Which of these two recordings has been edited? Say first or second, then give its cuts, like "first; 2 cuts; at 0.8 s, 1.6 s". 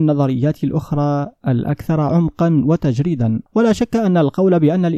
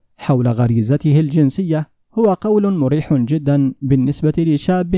first; 1 cut; at 3.5 s